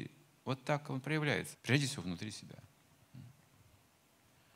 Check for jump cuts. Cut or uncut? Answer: cut